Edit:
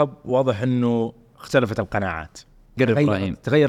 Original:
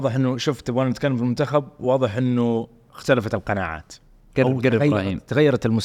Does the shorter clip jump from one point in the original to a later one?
yes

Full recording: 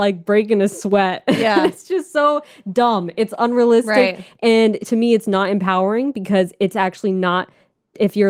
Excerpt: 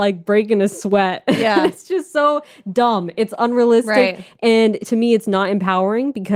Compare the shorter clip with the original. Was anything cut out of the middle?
no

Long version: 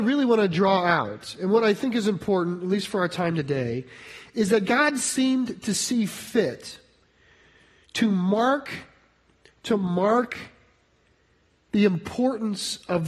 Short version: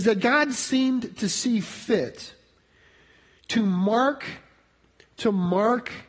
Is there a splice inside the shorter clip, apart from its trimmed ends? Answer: no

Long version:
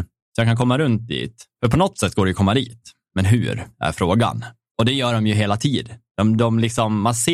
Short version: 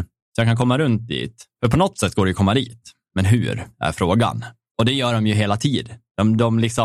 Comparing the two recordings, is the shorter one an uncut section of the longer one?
yes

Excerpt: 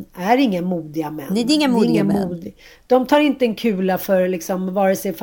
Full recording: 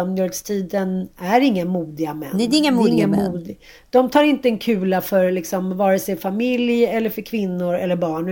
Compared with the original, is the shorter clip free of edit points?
yes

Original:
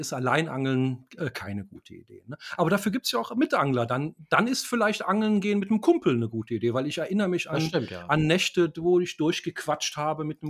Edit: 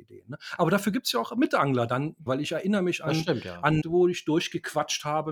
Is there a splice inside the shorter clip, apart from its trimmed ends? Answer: yes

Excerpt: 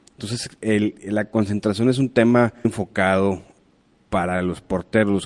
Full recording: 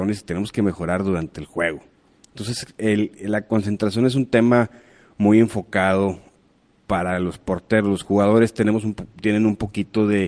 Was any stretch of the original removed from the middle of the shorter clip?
yes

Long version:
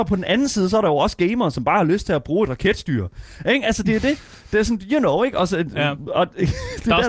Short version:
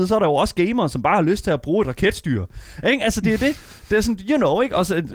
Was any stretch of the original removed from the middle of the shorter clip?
no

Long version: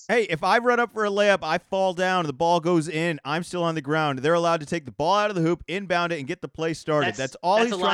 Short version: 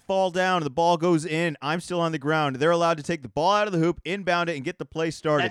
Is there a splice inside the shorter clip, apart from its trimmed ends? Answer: no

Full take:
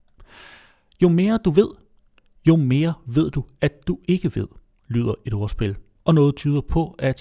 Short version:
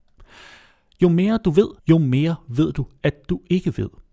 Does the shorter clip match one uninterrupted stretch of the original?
no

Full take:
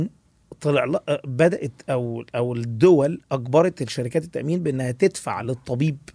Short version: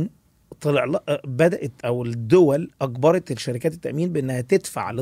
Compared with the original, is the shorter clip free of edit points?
no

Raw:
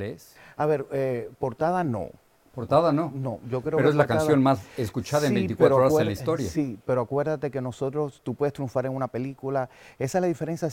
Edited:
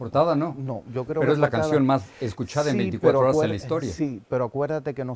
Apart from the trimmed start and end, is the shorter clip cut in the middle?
no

